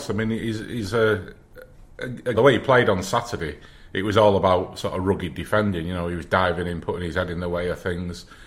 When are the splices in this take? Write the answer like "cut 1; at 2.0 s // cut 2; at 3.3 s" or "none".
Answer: cut 1; at 2.3 s